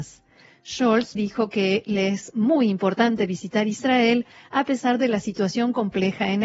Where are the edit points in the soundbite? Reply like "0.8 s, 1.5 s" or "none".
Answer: 1.2 s